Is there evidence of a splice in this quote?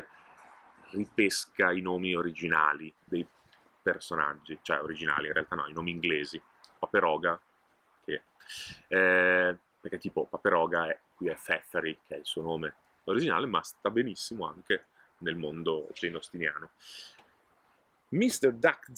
yes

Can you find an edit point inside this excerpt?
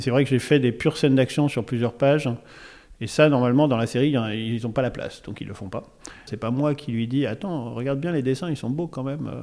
yes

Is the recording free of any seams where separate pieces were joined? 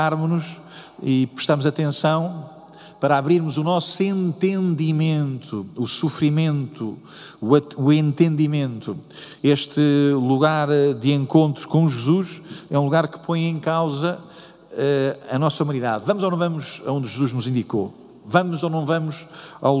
yes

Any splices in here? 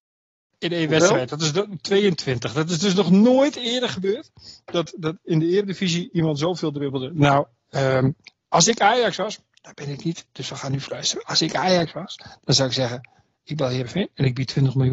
no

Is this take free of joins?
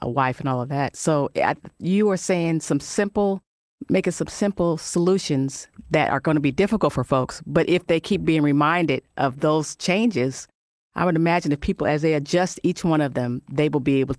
yes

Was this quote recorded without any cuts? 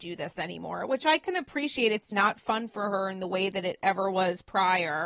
no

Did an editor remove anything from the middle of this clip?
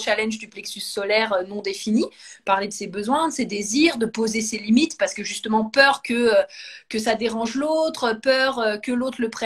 no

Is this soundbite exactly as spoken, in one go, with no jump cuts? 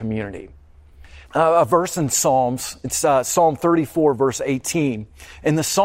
no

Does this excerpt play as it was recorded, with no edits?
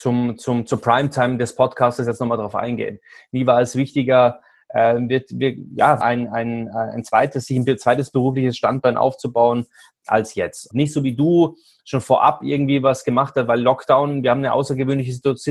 no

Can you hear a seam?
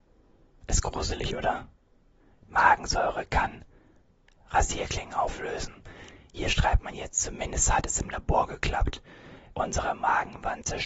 yes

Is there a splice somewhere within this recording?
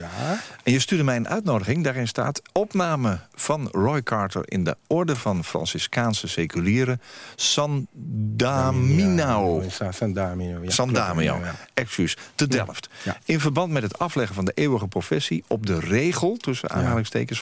no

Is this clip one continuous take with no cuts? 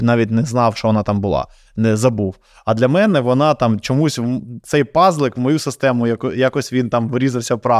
yes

